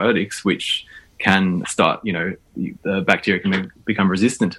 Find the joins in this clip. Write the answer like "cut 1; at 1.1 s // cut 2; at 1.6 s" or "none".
cut 1; at 1.6 s